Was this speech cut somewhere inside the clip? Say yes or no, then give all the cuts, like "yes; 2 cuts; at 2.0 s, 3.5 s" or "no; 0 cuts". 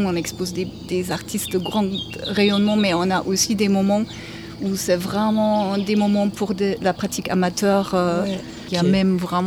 no; 0 cuts